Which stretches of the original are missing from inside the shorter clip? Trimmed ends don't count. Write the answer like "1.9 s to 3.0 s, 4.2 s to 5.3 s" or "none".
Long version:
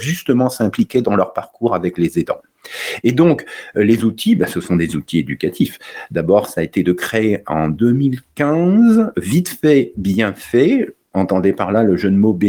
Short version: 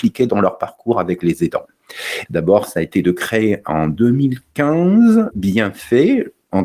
3.0 s to 6.1 s, 9.1 s to 9.9 s